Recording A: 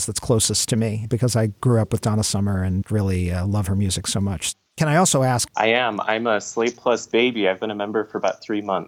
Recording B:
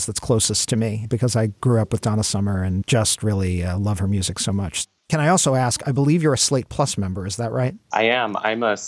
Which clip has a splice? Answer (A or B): A